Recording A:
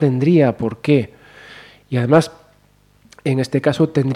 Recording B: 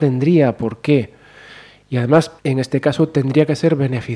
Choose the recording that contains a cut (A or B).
B